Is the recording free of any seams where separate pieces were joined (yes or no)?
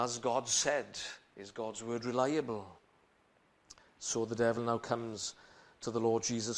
yes